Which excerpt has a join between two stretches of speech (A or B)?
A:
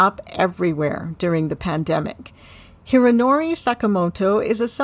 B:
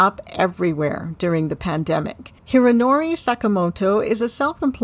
B